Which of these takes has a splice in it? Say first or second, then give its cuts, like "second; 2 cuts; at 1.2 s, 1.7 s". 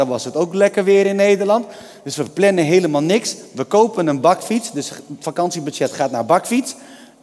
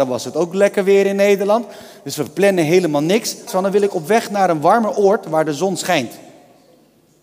second; 1 cut; at 3.5 s